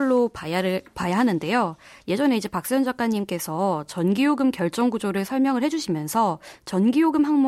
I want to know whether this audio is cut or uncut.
uncut